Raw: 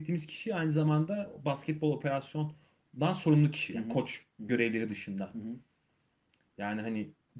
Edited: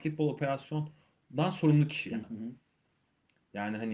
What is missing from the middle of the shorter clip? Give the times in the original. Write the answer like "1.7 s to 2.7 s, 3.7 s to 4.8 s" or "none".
3.9 s to 5.3 s